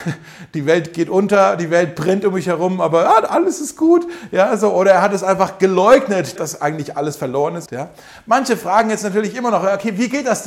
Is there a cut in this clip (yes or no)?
yes